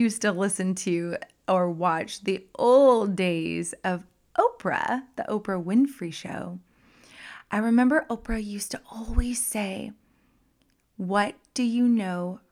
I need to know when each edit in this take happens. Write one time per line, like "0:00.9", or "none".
none